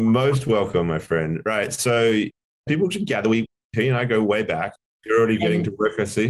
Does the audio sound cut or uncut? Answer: cut